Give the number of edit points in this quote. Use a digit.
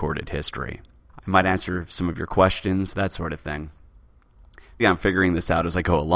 2